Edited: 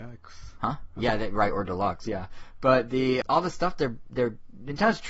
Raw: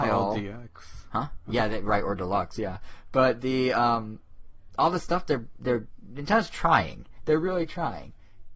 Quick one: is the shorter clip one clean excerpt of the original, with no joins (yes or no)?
no